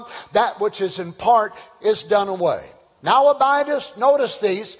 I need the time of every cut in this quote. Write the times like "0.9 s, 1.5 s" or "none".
2.8 s